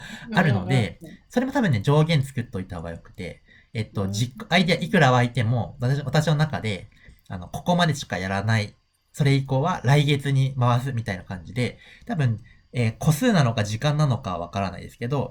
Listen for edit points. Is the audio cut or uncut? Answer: uncut